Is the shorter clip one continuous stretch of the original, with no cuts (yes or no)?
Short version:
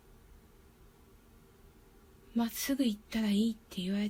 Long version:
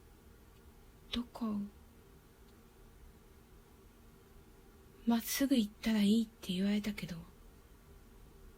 yes